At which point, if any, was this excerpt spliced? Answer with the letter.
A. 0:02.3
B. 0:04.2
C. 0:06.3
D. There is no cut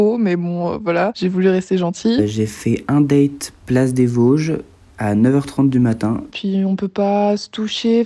C